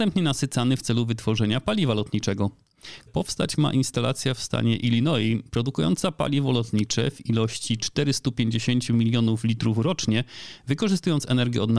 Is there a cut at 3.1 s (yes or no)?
yes